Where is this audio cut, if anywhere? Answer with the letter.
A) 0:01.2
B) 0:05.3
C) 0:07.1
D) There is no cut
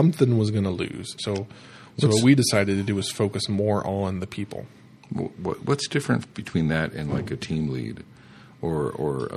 A